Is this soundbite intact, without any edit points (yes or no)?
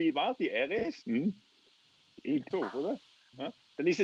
no